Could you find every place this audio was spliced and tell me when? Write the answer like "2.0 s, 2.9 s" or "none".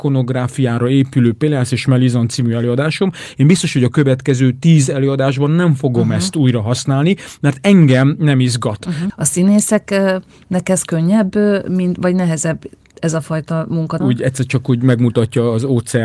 9.1 s, 14.0 s